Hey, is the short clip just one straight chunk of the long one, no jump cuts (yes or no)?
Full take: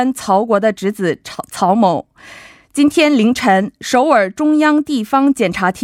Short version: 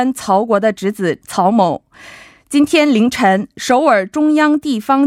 no